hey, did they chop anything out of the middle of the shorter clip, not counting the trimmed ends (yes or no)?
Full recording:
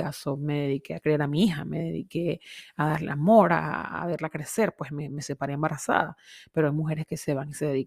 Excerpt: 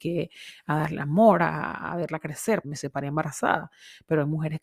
yes